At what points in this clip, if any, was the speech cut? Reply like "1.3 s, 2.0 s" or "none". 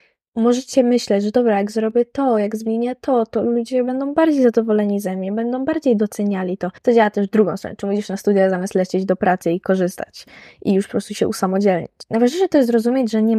6.8 s